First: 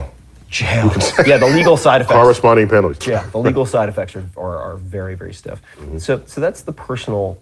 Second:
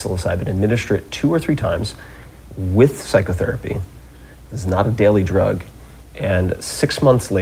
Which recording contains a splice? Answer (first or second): first